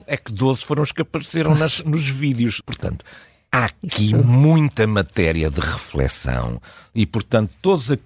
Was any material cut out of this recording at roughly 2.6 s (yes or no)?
yes